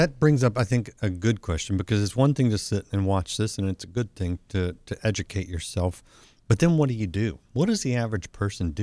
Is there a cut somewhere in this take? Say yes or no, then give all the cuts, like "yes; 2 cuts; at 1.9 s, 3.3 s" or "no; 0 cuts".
no; 0 cuts